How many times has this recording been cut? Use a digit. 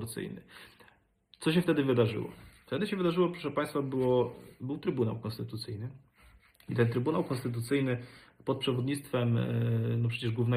0